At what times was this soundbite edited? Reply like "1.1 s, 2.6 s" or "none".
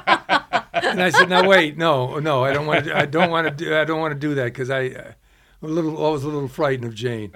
none